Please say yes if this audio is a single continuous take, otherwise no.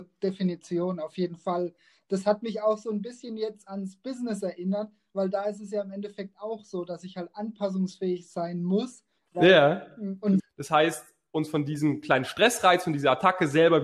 no